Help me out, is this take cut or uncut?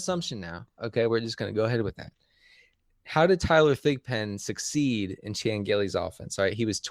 uncut